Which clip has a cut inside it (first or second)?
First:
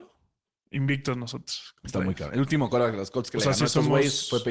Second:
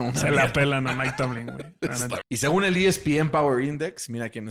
second